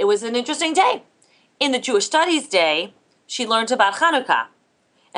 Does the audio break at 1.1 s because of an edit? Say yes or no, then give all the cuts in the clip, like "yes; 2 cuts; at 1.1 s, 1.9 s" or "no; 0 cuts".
no; 0 cuts